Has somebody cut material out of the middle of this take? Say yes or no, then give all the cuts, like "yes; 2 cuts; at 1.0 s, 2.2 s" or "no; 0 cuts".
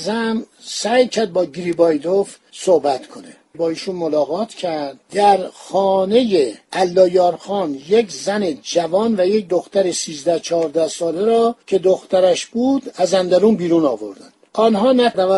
yes; 1 cut; at 11.6 s